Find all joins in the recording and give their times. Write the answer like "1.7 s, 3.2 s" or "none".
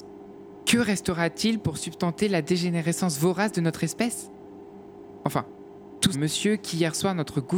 6.1 s